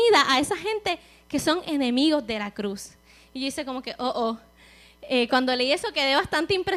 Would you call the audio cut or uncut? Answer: uncut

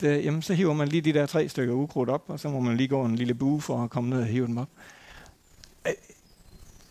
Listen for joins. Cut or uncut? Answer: uncut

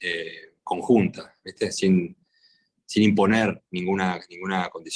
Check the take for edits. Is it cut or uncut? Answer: uncut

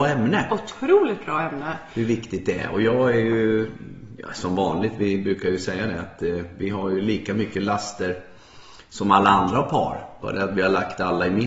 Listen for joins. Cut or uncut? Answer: uncut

